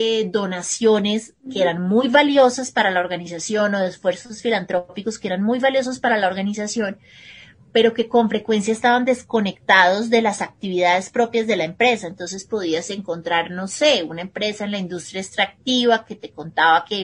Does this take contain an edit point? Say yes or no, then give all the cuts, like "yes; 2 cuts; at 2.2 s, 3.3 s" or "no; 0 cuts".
no; 0 cuts